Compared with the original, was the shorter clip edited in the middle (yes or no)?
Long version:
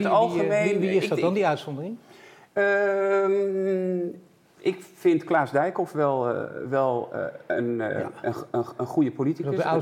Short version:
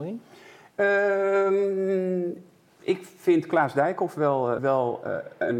yes